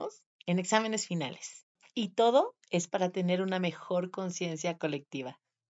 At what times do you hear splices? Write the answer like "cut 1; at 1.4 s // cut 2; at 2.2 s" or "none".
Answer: none